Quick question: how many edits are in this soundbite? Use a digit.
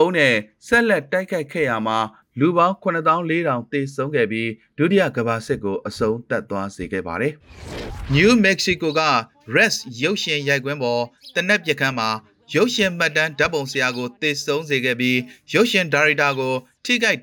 1